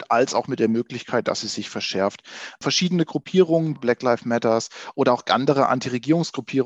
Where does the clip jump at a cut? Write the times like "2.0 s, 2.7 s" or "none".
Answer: 3.8 s